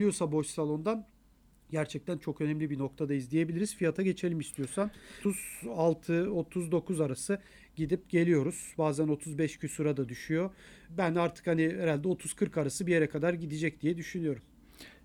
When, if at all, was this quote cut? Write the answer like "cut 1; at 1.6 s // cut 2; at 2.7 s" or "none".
none